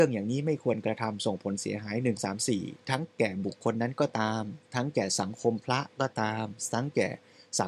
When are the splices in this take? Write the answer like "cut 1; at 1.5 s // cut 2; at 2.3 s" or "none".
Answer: cut 1; at 2.2 s